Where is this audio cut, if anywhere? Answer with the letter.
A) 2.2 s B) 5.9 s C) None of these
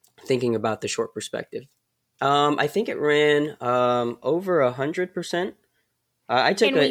A